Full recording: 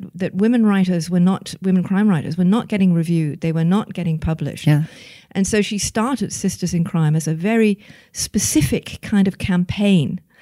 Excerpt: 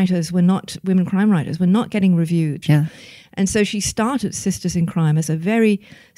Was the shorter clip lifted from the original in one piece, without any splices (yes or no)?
no